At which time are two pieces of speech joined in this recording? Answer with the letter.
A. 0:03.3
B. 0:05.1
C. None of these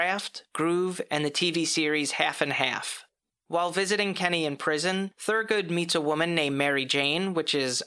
A